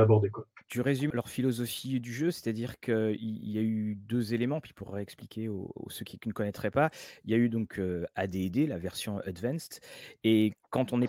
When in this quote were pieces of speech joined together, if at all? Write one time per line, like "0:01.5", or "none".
0:01.1